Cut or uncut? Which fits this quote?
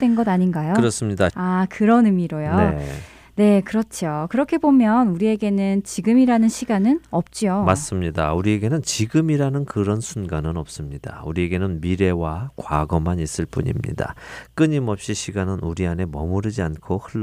cut